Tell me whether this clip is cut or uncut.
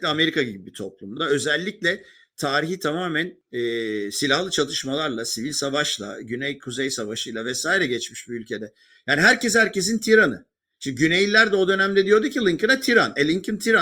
uncut